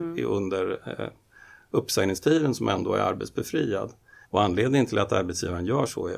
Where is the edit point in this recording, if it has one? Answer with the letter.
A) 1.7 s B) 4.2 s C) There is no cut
B